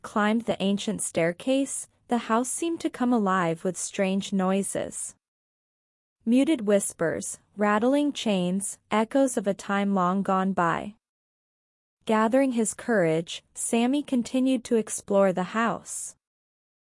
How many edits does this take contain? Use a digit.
1